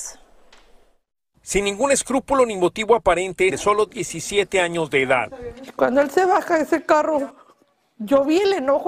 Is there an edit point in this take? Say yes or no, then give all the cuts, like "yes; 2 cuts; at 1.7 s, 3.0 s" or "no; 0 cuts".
yes; 1 cut; at 3.5 s